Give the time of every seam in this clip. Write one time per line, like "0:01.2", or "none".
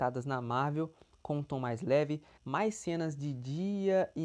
0:02.4